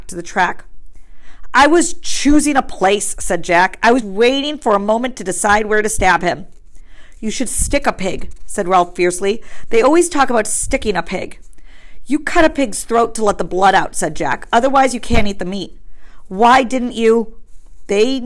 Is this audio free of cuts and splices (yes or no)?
no